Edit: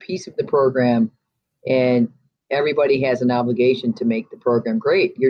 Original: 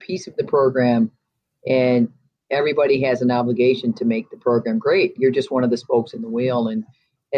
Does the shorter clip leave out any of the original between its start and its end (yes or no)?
no